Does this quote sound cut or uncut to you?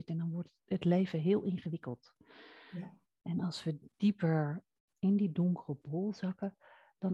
uncut